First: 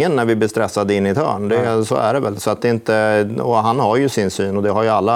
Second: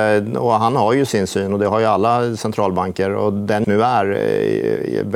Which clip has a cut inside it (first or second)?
second